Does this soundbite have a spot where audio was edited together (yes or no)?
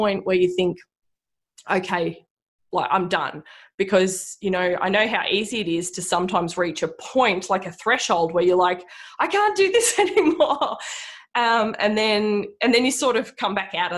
no